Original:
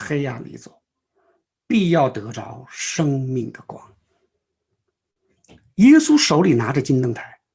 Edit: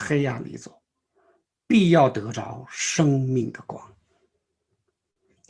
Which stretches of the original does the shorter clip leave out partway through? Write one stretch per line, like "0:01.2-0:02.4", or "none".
none